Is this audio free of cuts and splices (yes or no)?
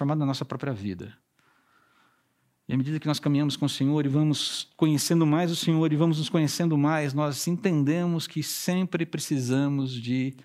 yes